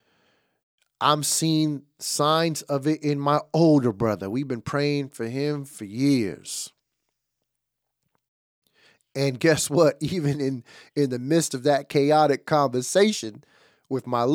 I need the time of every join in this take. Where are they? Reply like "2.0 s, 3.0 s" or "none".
none